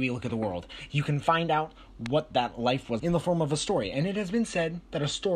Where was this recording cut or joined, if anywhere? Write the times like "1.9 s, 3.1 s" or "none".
3.0 s